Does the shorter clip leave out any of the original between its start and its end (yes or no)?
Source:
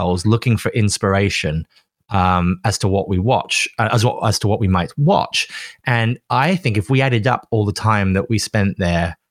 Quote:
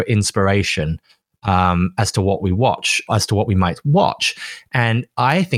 yes